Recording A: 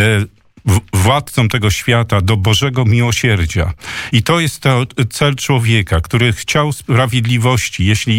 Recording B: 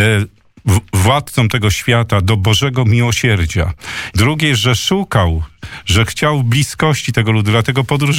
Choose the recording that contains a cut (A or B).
B